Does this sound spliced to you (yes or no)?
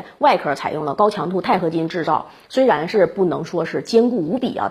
no